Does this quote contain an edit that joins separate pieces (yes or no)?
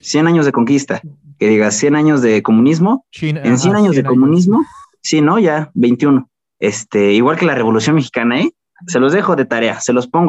no